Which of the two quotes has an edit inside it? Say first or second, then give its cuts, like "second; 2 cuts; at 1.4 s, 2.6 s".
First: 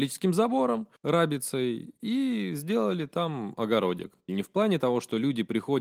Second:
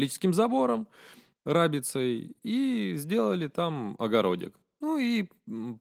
first; 2 cuts; at 1.0 s, 4.3 s